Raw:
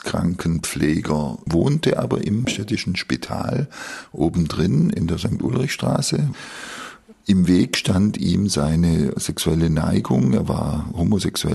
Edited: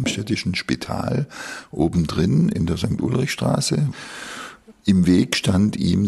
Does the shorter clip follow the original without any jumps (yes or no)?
yes